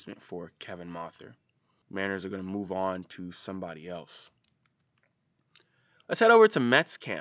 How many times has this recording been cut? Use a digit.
1